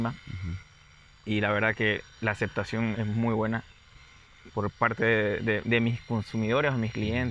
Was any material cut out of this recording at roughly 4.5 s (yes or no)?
yes